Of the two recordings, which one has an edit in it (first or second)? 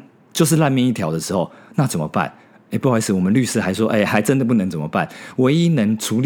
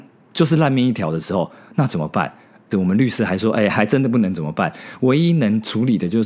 second